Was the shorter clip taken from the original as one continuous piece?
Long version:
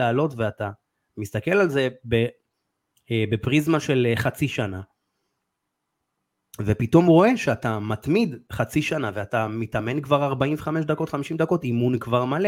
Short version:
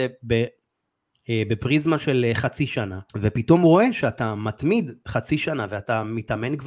no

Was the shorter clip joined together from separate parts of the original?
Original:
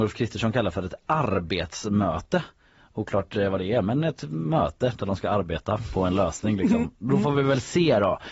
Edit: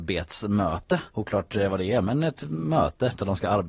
yes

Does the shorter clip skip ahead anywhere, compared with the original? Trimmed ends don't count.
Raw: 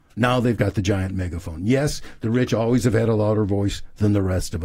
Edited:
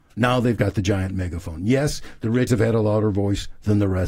yes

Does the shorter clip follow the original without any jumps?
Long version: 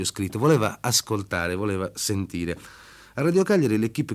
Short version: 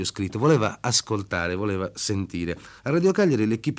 no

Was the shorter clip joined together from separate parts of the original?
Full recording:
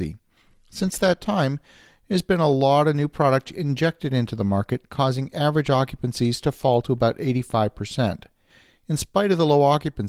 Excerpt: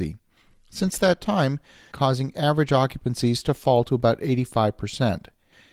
yes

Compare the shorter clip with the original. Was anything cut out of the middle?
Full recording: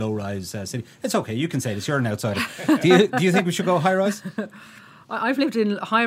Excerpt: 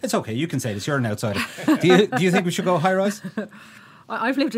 no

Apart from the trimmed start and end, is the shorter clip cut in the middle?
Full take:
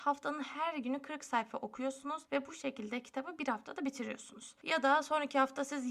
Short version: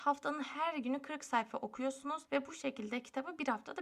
no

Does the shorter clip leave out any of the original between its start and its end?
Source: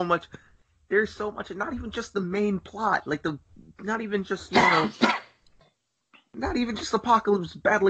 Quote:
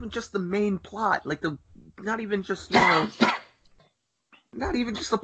no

